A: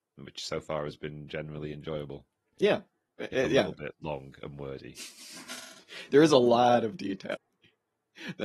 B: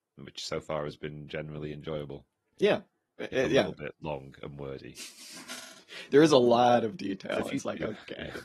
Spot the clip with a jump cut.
A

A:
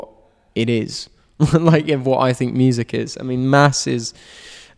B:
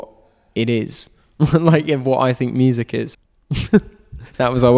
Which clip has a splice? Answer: B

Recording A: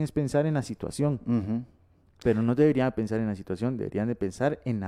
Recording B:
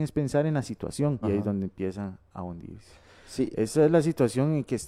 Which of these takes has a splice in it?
B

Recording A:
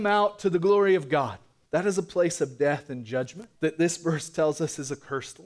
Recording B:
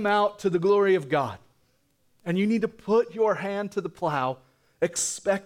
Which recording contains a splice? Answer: A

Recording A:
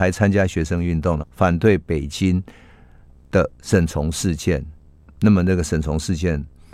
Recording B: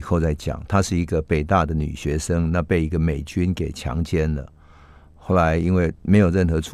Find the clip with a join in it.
A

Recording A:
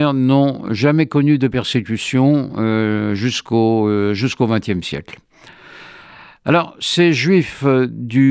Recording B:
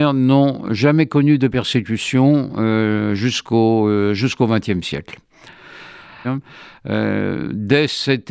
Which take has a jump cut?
B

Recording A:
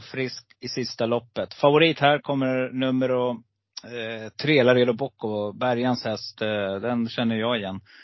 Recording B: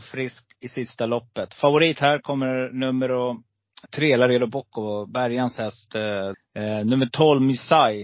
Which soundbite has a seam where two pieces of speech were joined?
B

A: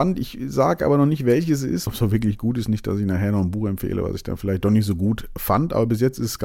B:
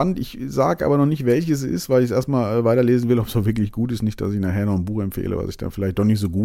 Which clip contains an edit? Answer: A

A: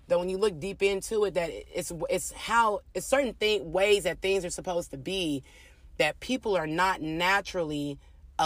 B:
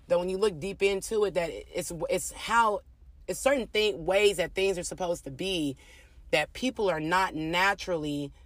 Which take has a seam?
A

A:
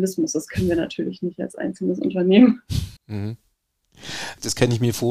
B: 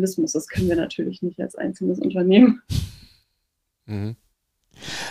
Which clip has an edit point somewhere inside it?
A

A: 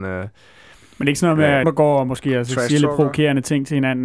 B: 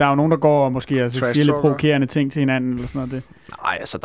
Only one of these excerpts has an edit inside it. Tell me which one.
A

